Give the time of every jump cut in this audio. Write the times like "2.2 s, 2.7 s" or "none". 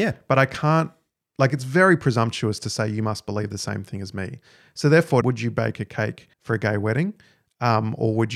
5.2 s, 6.3 s